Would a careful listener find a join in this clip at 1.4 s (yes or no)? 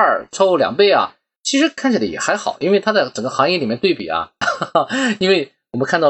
yes